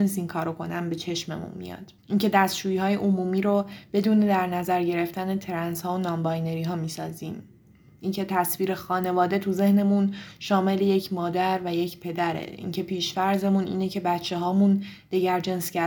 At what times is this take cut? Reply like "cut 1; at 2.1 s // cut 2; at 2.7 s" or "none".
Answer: cut 1; at 2.0 s